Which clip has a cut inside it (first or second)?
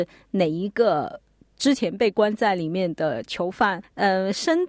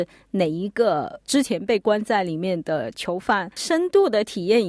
second